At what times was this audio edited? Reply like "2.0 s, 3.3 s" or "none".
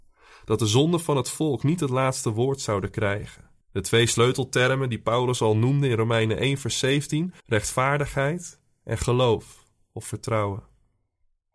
3.6 s, 7.4 s